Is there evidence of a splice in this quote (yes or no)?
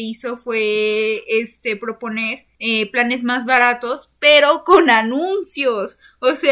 no